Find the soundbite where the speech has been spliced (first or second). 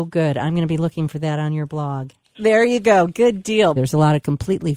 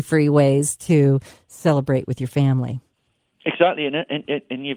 first